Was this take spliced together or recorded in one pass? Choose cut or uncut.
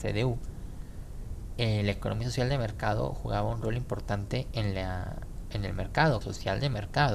cut